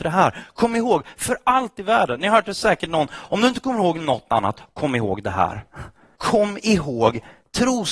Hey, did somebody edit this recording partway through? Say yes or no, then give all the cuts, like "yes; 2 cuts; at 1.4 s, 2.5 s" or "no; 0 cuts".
yes; 1 cut; at 6.2 s